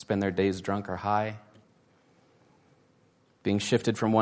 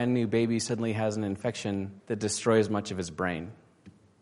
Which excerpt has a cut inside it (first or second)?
second